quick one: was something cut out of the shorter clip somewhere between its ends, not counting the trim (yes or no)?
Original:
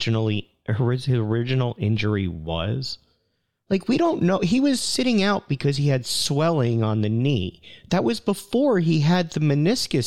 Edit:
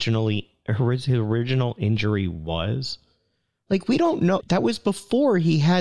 yes